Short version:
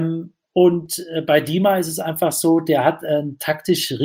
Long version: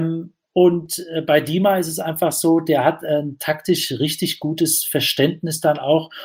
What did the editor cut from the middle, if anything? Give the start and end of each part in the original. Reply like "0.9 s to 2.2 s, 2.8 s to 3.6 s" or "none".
none